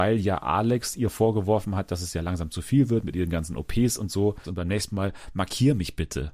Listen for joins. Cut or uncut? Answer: cut